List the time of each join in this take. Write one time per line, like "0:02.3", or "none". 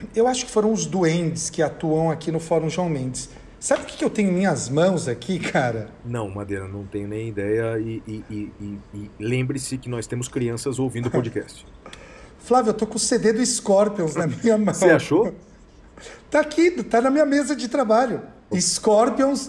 0:18.5